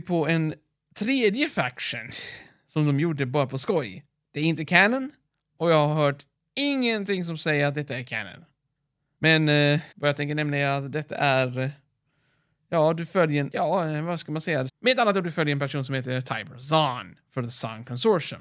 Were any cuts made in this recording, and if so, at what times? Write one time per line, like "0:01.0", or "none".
0:09.9
0:14.7

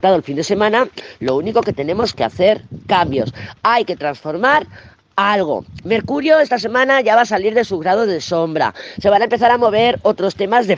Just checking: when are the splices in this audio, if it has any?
0:09.0

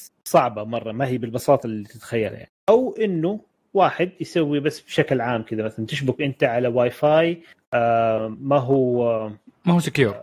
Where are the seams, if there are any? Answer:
none

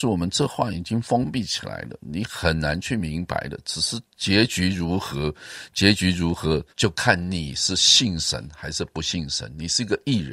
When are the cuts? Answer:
0:06.7

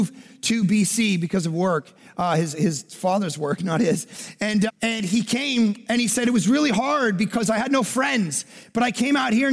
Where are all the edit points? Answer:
0:04.7

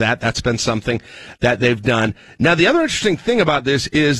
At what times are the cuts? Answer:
none

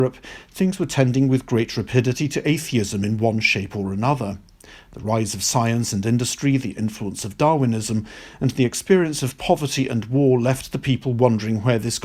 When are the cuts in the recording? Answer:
none

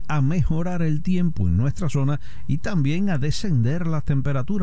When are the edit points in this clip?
none

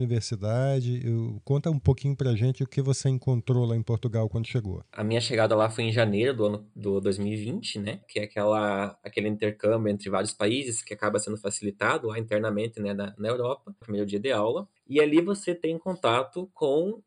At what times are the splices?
0:08.0
0:13.8

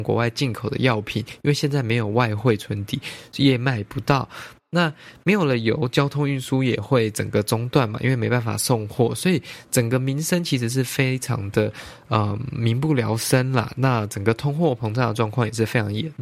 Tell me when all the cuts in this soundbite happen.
none

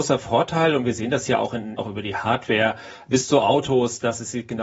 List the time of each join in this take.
0:01.8

